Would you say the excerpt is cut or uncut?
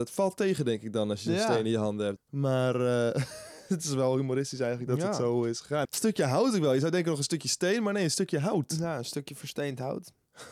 cut